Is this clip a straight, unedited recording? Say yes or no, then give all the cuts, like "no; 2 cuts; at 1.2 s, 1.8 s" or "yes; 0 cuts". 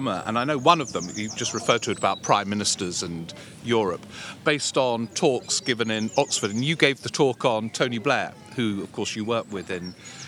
yes; 0 cuts